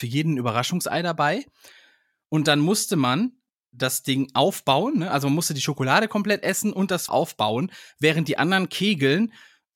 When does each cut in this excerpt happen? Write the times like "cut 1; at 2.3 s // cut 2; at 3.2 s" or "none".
cut 1; at 7.1 s